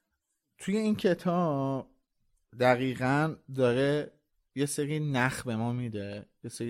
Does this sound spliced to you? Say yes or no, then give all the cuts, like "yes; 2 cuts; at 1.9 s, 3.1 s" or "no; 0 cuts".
no; 0 cuts